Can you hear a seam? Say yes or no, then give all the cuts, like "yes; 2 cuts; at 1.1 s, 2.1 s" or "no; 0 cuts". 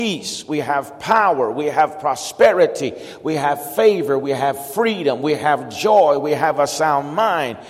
no; 0 cuts